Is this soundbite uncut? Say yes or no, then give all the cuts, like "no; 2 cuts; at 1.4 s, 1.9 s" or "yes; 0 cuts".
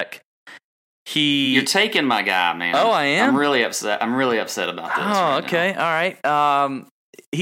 yes; 0 cuts